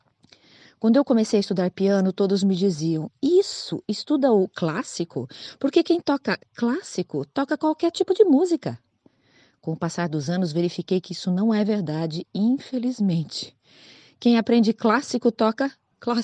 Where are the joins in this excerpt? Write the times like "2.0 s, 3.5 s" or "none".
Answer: none